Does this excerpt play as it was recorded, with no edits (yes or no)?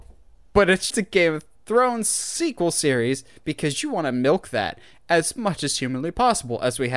no